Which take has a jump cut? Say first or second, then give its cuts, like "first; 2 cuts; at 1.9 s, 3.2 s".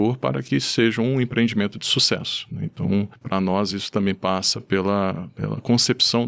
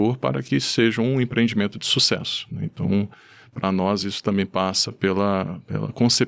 first; 1 cut; at 3.2 s